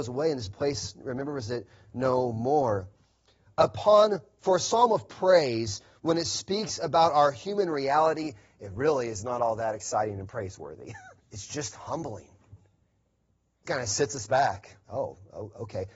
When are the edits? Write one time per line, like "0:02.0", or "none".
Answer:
0:11.2
0:13.6
0:14.8